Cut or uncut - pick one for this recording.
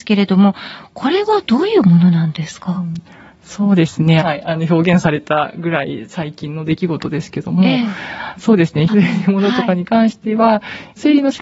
cut